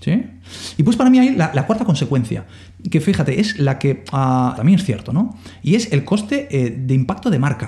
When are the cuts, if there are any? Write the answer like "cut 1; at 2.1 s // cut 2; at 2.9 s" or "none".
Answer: cut 1; at 4.6 s